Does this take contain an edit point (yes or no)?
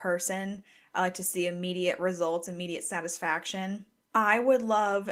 yes